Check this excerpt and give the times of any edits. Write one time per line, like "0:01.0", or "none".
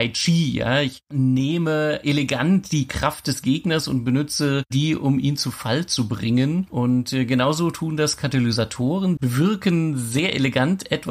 0:09.2